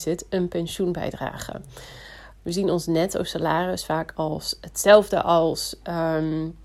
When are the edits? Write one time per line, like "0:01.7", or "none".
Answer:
0:02.4